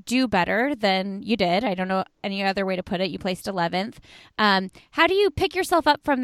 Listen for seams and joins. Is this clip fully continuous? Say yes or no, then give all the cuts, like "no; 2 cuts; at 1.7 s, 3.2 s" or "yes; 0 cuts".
yes; 0 cuts